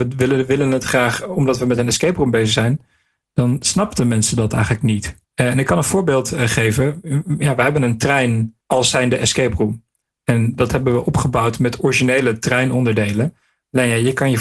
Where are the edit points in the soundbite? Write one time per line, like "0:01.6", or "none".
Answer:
0:05.2
0:08.6